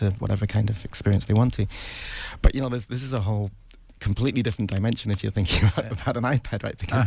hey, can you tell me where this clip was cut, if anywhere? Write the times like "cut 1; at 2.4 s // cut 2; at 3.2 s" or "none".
none